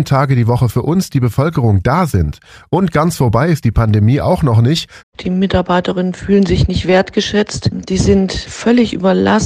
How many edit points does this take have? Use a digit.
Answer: 1